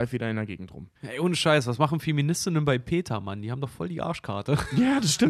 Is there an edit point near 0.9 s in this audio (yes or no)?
yes